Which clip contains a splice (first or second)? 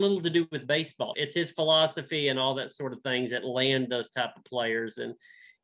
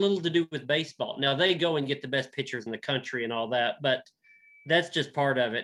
first